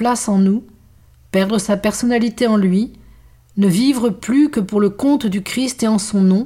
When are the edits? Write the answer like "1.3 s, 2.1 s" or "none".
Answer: none